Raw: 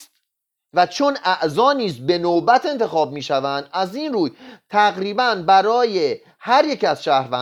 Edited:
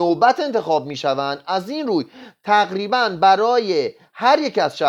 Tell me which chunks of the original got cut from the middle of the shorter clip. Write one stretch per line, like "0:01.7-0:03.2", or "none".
none

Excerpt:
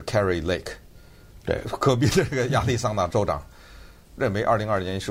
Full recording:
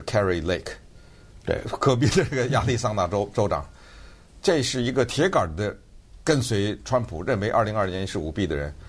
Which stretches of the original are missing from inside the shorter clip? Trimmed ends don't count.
0:03.1-0:03.3
0:04.4-0:07.2

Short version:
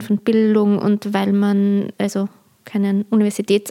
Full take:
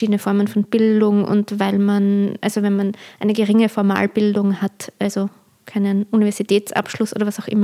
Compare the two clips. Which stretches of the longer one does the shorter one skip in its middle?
0:02.4-0:04.9

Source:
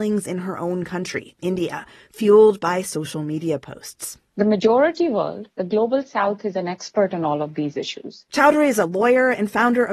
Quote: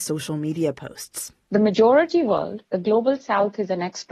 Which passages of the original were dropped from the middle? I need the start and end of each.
none

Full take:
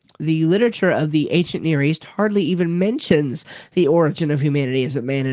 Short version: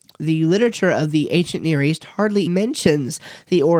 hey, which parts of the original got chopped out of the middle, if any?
0:02.5-0:02.7

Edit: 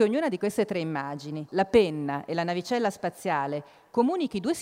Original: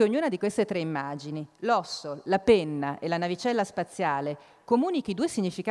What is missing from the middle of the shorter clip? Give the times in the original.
0:01.5-0:02.2

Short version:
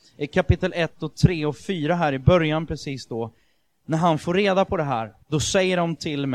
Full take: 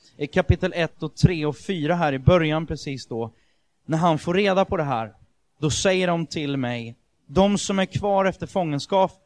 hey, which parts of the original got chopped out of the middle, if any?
0:05.2-0:05.5

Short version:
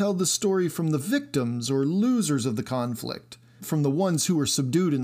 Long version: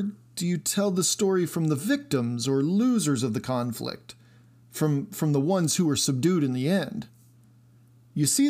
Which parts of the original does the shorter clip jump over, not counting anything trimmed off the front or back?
0:04.4-0:05.1

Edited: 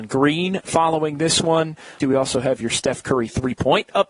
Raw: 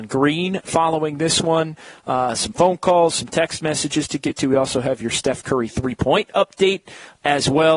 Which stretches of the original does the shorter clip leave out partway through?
0:02.0-0:04.4

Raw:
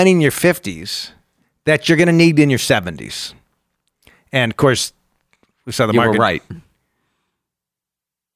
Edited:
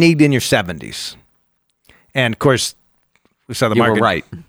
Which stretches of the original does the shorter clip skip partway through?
none

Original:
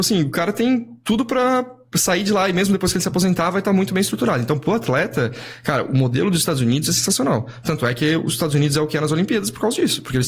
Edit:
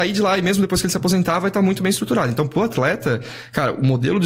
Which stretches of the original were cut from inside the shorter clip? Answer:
none

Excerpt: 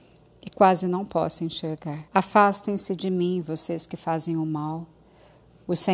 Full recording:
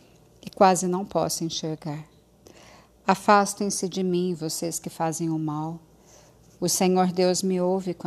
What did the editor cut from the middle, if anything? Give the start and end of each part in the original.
0:02.1-0:03.0

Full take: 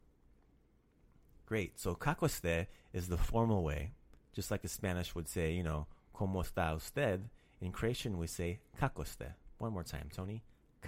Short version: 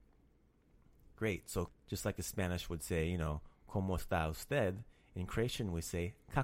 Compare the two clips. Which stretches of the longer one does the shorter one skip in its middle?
0:02.0-0:04.1

